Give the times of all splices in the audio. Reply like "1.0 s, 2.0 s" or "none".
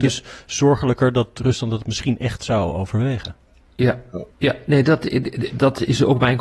4.3 s, 5.5 s